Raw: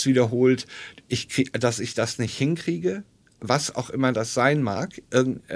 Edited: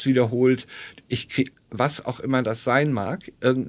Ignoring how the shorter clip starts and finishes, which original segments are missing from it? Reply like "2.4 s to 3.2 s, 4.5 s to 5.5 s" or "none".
1.5 s to 3.2 s